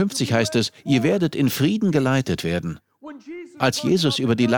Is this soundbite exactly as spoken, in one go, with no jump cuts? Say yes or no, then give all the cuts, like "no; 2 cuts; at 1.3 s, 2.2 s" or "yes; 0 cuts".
yes; 0 cuts